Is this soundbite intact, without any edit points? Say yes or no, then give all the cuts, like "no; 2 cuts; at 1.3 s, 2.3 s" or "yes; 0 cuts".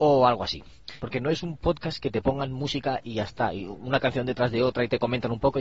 no; 1 cut; at 1.0 s